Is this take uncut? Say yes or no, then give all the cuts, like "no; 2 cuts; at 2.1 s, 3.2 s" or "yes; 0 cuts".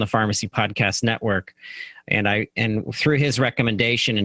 yes; 0 cuts